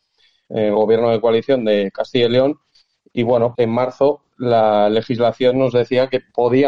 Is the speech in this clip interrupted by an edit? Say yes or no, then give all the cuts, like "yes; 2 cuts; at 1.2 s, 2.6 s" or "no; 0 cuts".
yes; 1 cut; at 3.5 s